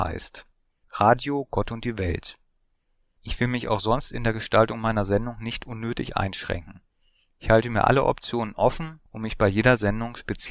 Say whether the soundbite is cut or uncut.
uncut